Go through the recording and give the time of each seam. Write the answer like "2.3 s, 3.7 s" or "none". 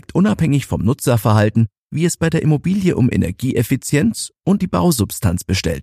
4.6 s